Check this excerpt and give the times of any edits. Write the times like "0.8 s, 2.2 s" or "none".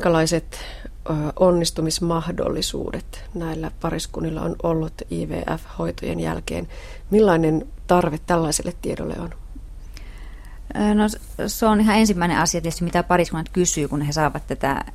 none